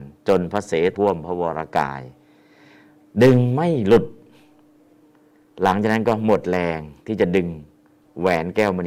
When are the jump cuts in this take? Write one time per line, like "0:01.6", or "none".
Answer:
0:00.9